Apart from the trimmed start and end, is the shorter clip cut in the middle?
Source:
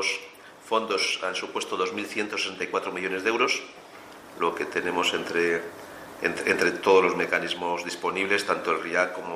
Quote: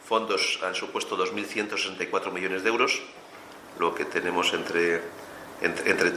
no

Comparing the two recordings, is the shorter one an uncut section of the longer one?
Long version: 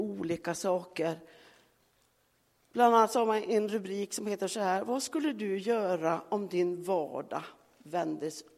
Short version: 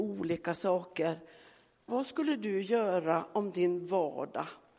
no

